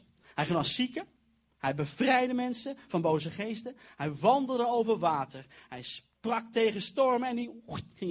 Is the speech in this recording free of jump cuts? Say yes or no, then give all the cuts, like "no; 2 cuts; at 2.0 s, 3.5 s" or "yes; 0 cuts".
yes; 0 cuts